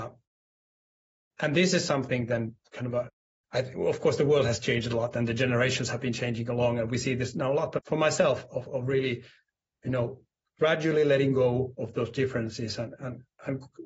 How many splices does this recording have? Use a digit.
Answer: 1